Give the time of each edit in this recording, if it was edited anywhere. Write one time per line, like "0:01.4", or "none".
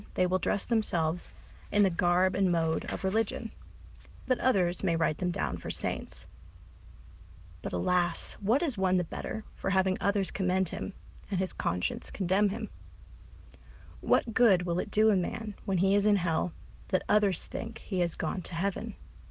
0:04.3

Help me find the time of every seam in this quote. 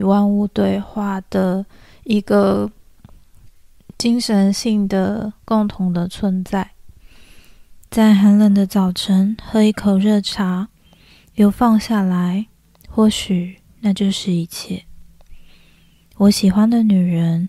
0:07.8

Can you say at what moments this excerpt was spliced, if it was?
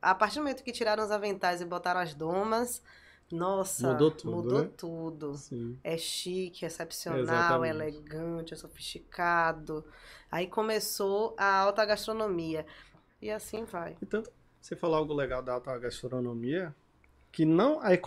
0:12.9

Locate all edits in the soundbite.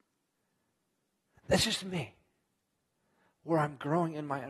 none

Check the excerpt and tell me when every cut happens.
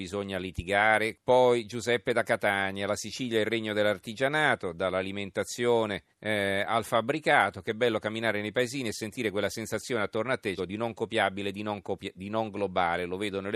0:01.1
0:06.1
0:10.6

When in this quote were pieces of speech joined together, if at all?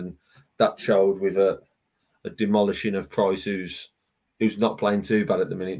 none

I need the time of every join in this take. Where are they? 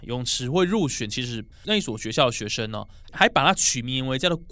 0:01.5
0:03.0

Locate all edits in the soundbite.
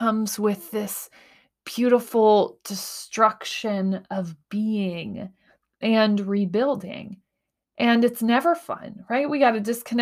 none

